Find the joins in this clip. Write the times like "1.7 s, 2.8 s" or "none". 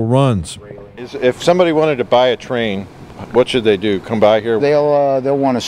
4.6 s